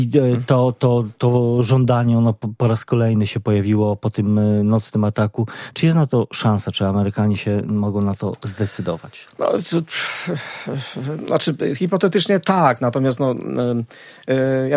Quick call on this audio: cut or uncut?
uncut